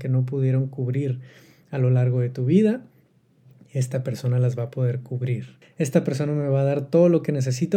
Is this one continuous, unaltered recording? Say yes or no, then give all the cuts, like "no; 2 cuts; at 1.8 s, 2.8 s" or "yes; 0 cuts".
no; 1 cut; at 5.6 s